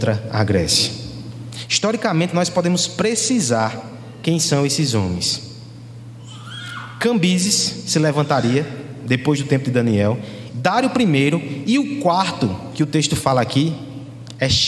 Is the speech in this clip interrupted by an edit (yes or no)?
yes